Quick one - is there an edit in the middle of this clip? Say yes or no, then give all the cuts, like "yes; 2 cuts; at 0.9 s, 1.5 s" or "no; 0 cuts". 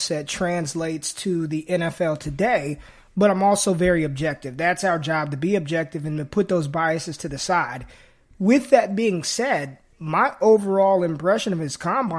no; 0 cuts